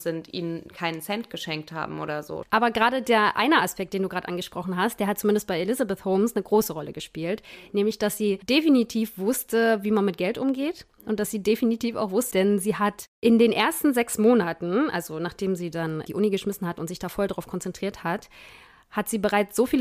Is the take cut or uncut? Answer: cut